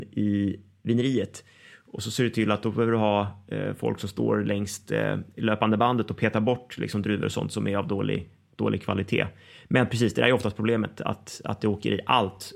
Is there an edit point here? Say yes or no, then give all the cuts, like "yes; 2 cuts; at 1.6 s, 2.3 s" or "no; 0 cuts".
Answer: no; 0 cuts